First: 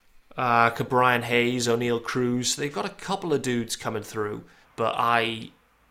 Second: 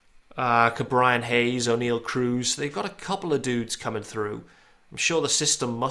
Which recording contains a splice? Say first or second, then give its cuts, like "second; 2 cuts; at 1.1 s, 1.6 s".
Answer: first; 1 cut; at 4.6 s